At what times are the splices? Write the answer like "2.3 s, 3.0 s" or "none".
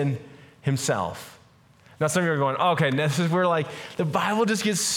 none